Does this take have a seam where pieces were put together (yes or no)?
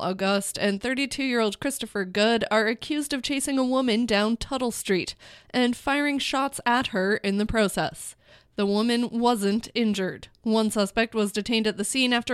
yes